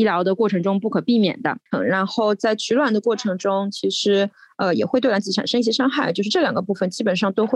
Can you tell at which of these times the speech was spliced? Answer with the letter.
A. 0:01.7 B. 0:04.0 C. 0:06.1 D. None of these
A